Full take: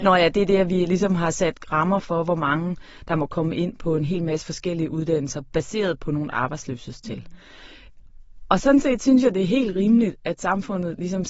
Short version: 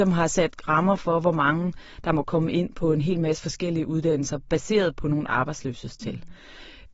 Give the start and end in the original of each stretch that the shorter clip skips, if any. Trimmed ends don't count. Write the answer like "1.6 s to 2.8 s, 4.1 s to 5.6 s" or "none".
none